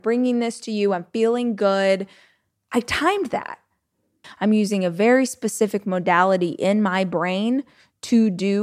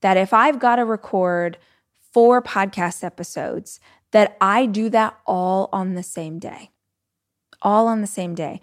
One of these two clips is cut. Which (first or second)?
first